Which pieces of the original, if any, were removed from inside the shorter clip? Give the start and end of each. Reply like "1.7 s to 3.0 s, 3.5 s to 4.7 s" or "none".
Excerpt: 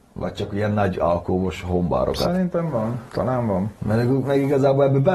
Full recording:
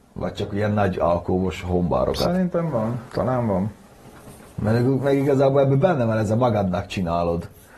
3.8 s to 4.5 s